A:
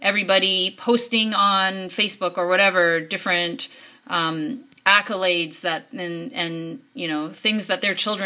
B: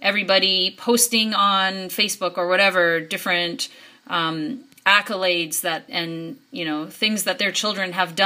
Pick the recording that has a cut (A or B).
B